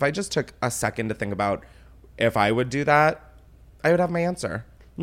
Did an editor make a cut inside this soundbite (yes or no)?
no